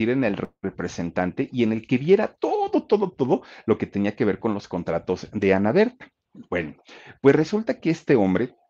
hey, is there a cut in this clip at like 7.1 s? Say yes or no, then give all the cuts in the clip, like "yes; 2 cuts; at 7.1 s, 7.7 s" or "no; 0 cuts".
no; 0 cuts